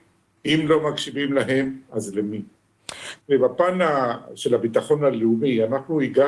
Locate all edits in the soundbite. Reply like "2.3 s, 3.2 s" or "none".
3.2 s